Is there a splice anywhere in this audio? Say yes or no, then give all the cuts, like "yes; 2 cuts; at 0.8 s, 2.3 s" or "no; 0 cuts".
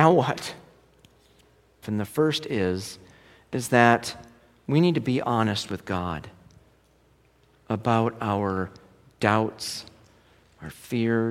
yes; 1 cut; at 1.8 s